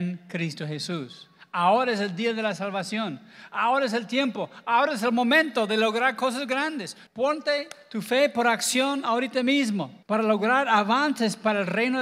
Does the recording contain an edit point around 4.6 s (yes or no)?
no